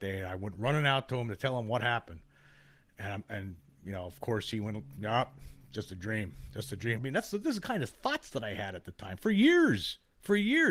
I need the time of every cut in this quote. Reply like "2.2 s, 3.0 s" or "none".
7.0 s